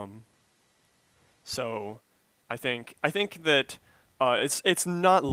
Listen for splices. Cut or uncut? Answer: uncut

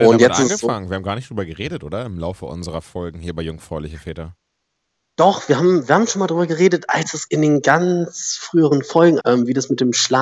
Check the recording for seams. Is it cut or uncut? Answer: cut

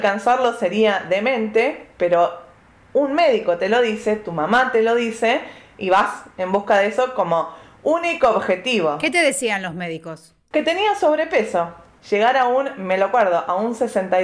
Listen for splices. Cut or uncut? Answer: cut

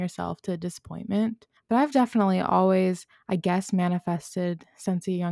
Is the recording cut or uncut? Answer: uncut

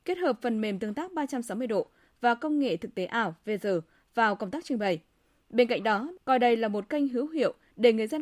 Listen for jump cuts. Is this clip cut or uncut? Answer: cut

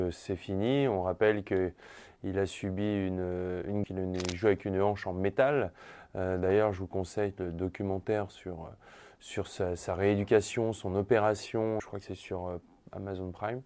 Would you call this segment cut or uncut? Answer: cut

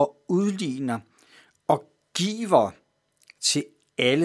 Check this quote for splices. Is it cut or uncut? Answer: uncut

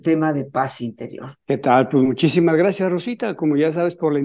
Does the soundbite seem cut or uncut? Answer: cut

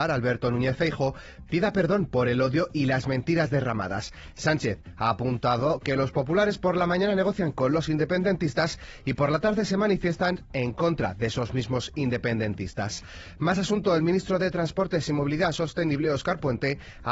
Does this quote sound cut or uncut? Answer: uncut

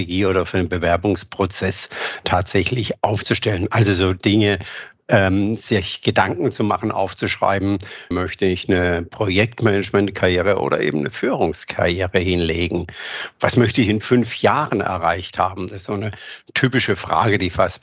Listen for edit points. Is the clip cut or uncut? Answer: cut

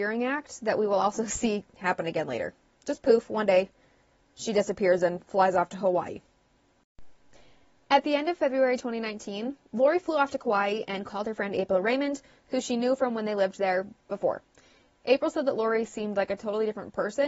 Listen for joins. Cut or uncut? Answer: uncut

